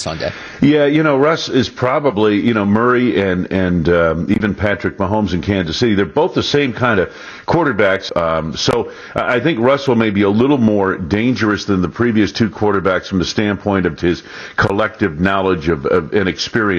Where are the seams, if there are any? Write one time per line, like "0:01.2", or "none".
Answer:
0:08.1
0:14.0